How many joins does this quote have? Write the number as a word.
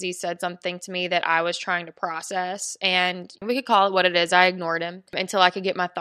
zero